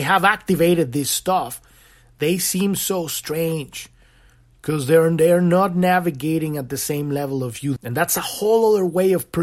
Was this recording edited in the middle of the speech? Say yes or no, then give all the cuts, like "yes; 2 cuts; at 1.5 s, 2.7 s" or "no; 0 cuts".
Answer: yes; 1 cut; at 7.8 s